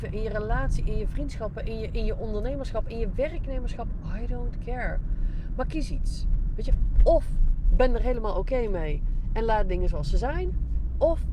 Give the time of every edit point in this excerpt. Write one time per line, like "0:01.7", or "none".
none